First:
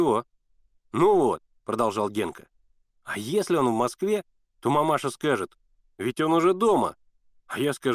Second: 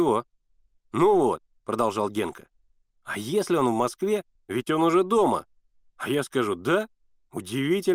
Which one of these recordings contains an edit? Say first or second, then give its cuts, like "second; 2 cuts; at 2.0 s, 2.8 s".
second; 1 cut; at 4.4 s